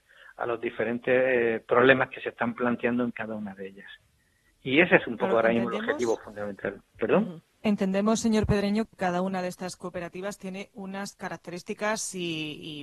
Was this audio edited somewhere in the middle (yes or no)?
no